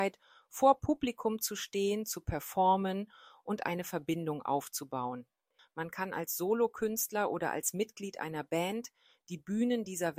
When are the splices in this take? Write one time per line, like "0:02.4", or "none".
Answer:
0:05.6